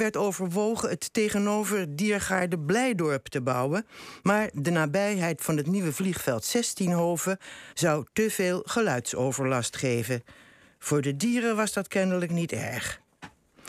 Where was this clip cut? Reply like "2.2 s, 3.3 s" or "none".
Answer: 7.7 s